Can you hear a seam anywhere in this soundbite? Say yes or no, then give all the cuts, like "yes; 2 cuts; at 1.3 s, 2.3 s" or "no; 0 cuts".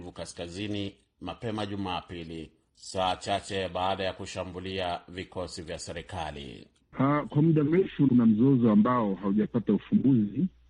yes; 1 cut; at 6.9 s